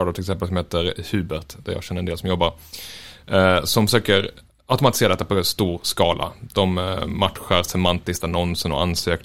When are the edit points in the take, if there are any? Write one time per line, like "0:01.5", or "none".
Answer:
none